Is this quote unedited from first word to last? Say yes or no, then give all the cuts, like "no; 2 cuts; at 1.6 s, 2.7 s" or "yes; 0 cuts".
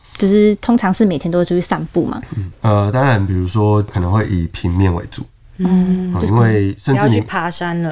no; 1 cut; at 2.5 s